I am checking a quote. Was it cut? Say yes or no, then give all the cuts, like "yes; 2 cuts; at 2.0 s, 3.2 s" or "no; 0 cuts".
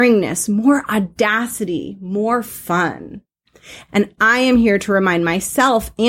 yes; 1 cut; at 3.9 s